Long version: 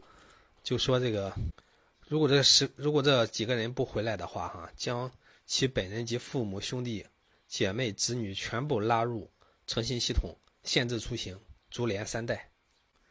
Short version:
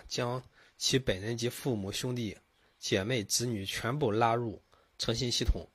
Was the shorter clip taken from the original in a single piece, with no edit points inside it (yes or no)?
yes